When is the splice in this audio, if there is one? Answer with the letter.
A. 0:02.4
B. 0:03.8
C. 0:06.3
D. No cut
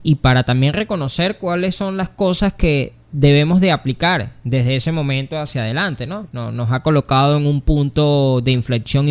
C